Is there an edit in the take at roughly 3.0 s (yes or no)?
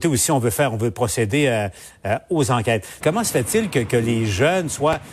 yes